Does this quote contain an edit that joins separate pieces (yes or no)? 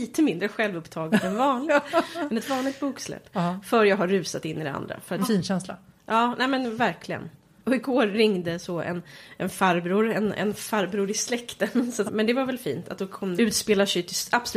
yes